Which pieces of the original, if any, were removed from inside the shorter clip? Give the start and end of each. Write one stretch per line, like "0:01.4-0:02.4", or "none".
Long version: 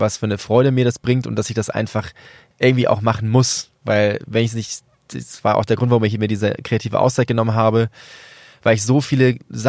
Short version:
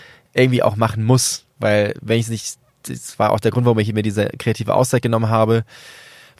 none